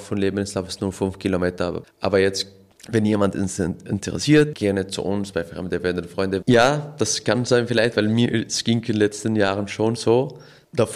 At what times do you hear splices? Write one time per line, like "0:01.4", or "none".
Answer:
0:01.8
0:04.5
0:06.4